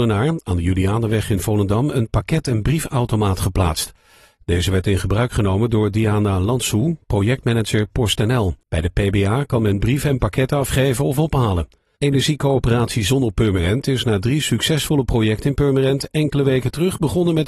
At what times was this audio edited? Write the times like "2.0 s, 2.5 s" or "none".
8.6 s, 11.9 s